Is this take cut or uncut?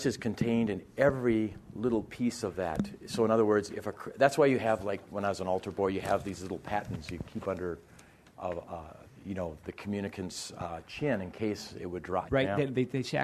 cut